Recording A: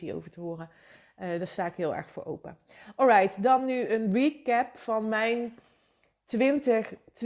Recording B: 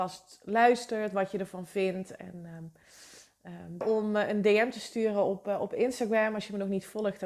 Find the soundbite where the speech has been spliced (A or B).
B